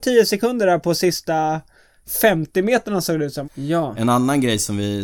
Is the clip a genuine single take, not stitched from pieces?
no; 1 cut; at 3.4 s

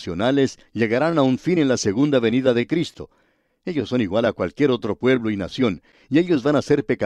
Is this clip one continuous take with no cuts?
yes; 0 cuts

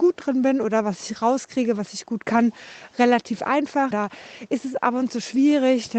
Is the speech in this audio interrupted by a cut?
yes; 1 cut; at 3.9 s

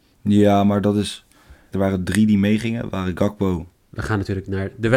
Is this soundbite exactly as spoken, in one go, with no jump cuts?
no; 2 cuts; at 1.7 s, 3.8 s

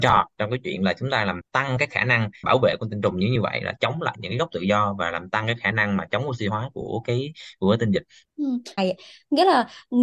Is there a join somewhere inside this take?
yes; 1 cut; at 8.8 s

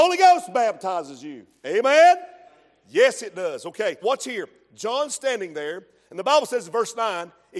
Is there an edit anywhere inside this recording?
yes; 1 cut; at 4.0 s

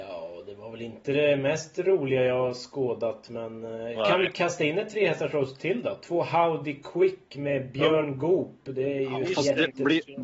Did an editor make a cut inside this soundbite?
no; 0 cuts

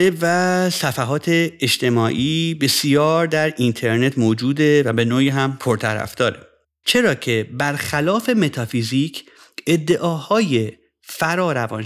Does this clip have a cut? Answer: yes; 1 cut; at 6.8 s

